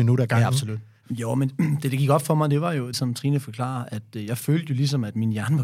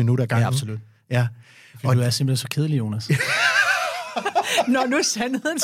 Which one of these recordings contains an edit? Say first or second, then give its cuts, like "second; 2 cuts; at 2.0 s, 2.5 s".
first; 2 cuts; at 1.0 s, 2.9 s